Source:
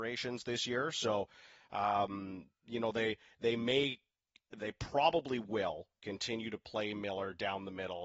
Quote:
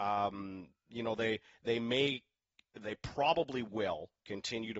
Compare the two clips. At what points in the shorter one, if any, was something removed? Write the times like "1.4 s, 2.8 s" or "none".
none